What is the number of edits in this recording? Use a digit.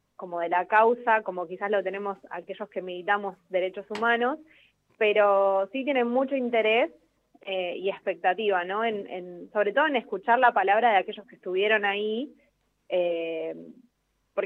0